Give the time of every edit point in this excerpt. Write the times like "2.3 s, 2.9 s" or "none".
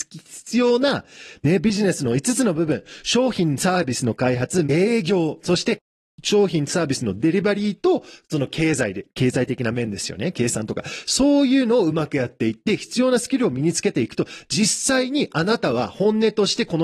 4.6 s